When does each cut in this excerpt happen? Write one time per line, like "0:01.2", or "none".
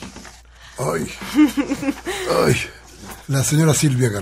0:03.2